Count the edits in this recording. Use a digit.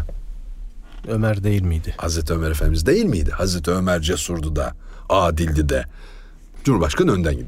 1